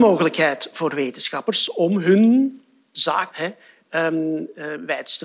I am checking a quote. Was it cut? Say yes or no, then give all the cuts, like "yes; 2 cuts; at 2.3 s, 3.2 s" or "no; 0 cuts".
yes; 1 cut; at 3.3 s